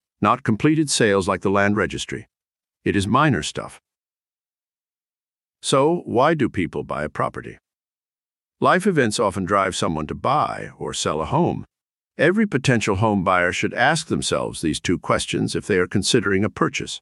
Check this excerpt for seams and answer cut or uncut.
uncut